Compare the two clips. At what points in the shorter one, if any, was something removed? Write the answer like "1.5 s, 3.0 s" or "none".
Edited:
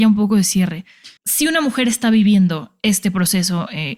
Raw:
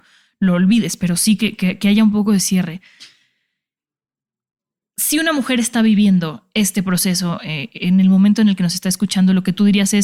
1.2 s